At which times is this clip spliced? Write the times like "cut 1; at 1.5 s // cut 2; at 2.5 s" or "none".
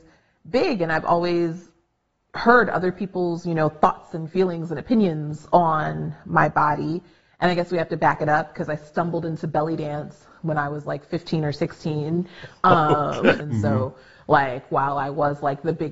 cut 1; at 13.4 s